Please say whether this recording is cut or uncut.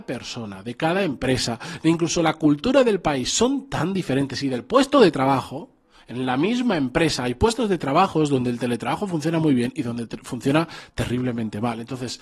uncut